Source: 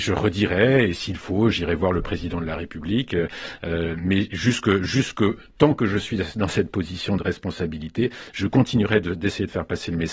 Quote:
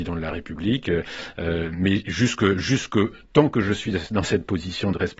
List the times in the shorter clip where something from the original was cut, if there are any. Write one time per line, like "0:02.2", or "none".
none